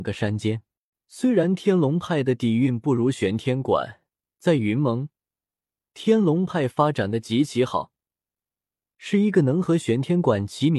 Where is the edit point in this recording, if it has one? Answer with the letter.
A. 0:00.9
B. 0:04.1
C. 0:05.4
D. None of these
A